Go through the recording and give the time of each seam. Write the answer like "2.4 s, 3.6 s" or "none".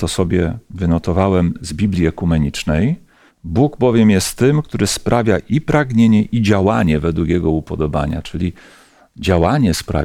3.3 s